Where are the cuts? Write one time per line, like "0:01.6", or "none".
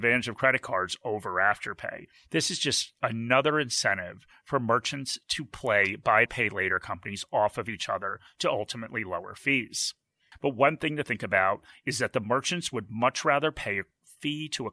0:06.3
0:10.3